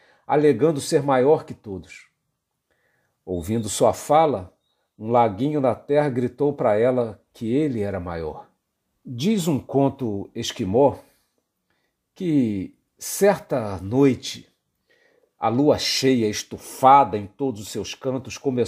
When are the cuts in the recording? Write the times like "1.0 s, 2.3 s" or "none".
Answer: 9.0 s

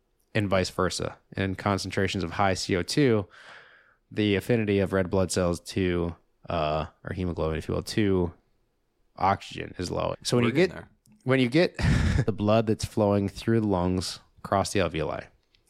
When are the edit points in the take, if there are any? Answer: 10.1 s, 12.3 s

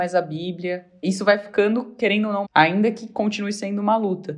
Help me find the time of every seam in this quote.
1.0 s, 2.4 s

